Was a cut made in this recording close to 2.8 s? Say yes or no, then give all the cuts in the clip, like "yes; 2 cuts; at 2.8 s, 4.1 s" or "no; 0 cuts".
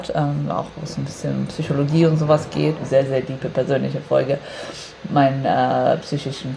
yes; 1 cut; at 2.8 s